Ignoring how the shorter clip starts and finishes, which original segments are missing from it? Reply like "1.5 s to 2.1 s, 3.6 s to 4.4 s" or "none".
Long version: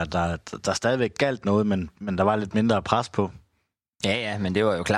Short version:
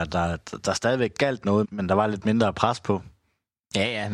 1.6 s to 1.9 s